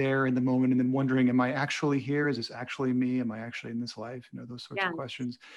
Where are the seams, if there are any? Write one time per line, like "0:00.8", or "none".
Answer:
none